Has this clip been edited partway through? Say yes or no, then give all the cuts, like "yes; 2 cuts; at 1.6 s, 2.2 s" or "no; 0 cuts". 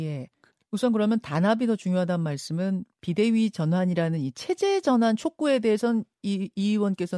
no; 0 cuts